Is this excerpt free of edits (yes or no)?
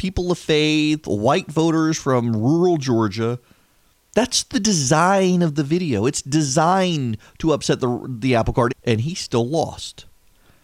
no